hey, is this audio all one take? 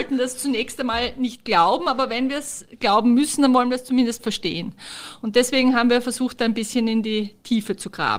yes; 0 cuts

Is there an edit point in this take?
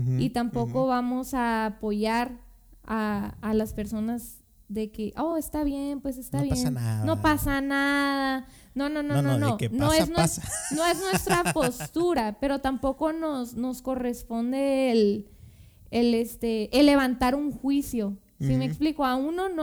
no; 0 cuts

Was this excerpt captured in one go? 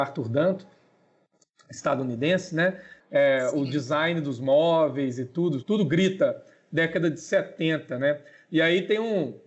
no; 2 cuts; at 3.0 s, 5.6 s

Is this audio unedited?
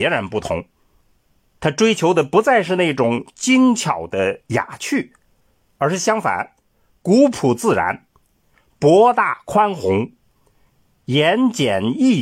yes; 0 cuts

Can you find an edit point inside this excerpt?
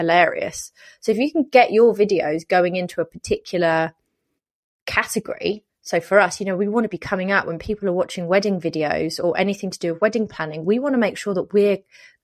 no; 0 cuts

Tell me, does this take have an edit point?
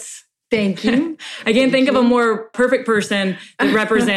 yes; 1 cut; at 2.5 s

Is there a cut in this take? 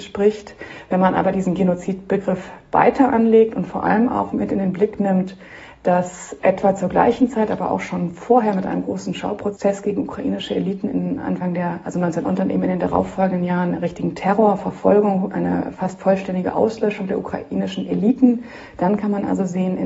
yes; 1 cut; at 12.2 s

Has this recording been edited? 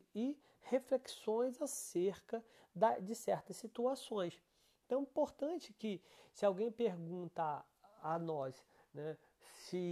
no; 0 cuts

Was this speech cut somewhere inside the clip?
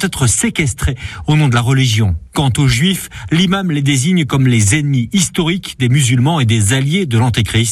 no; 0 cuts

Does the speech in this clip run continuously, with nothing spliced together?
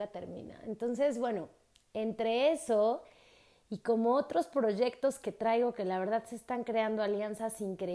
yes; 0 cuts

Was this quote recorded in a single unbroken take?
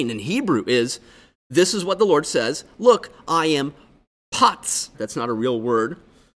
no; 1 cut; at 4.9 s

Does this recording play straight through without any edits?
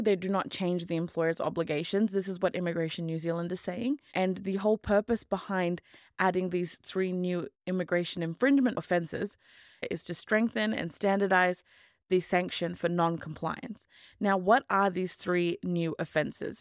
no; 1 cut; at 4.1 s

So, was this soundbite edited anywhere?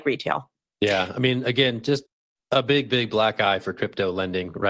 no; 0 cuts

